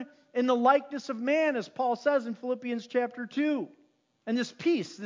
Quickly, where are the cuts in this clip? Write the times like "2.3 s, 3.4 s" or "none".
4.1 s